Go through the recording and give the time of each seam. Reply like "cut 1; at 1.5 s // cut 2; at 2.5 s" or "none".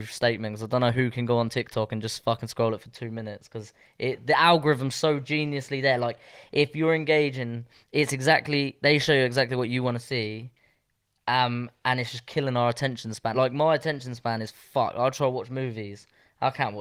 none